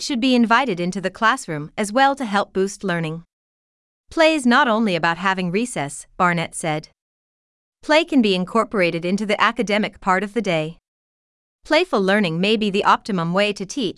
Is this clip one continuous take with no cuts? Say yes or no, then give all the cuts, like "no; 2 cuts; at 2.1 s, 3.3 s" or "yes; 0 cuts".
yes; 0 cuts